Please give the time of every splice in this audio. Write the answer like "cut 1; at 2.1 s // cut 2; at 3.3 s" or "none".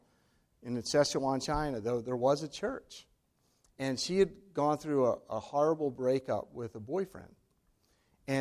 none